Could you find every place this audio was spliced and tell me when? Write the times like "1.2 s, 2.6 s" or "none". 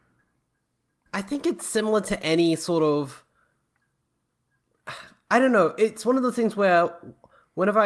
1.1 s